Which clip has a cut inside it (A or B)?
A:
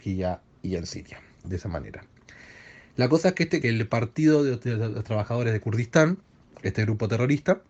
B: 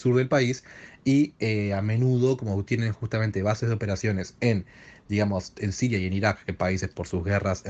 A